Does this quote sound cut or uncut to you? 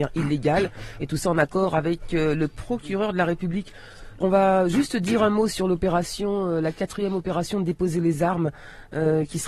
cut